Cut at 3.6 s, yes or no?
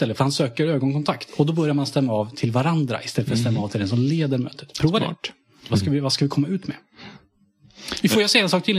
no